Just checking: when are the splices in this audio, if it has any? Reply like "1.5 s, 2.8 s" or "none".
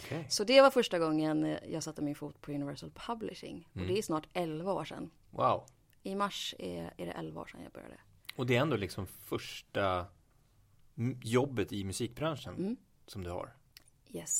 none